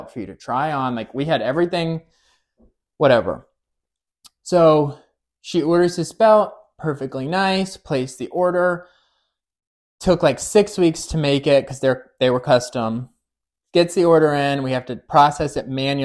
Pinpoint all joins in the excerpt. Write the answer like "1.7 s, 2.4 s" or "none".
none